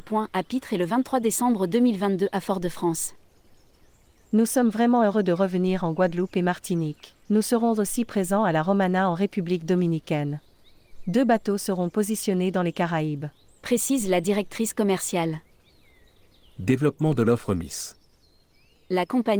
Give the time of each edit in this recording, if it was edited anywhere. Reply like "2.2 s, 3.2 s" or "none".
7.2 s